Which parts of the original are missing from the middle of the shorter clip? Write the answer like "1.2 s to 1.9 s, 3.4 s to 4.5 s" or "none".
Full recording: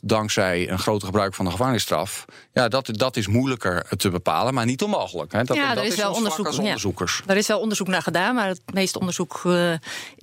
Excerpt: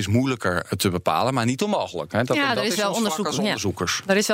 none

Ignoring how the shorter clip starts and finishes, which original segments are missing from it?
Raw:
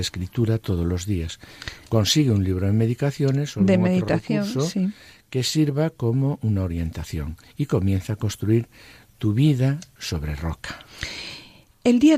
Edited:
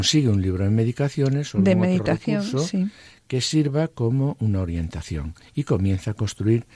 none

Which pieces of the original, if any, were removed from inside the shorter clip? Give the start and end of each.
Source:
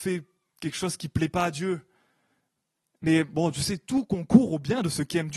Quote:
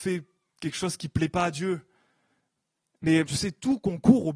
3.3 s to 3.5 s

